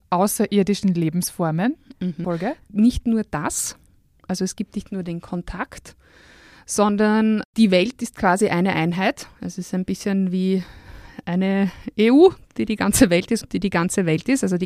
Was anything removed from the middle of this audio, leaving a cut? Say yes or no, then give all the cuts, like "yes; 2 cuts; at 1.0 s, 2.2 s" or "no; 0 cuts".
yes; 2 cuts; at 2.2 s, 13.4 s